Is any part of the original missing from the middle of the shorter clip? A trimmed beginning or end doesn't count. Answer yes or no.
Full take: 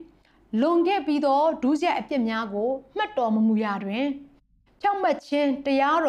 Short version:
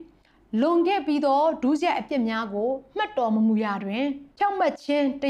yes